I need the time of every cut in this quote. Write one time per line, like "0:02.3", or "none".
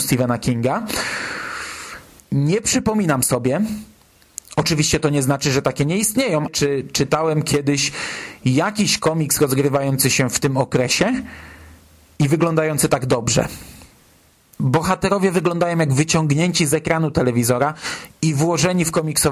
0:02.2
0:06.5